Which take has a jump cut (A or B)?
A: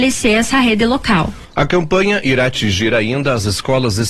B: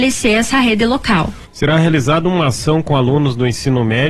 B